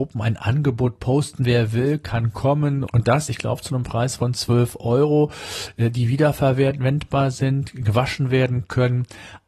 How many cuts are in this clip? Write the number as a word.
two